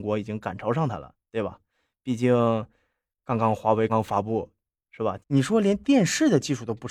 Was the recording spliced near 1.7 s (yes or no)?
no